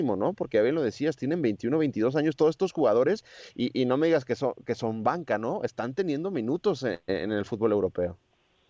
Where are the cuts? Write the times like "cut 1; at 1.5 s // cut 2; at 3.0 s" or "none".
none